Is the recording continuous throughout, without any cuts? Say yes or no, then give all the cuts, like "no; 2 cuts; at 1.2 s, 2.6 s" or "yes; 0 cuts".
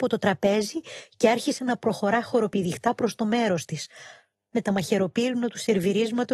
yes; 0 cuts